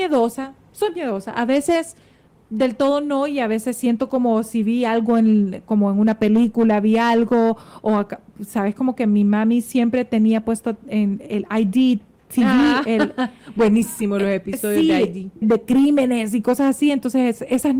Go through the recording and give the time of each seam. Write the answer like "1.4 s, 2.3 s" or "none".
15.4 s